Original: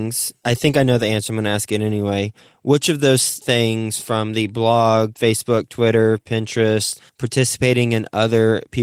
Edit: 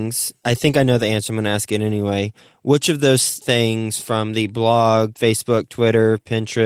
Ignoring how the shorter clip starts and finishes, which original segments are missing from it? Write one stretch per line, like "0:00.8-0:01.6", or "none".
none